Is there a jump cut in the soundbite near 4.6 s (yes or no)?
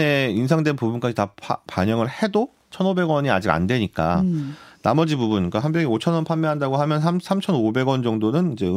no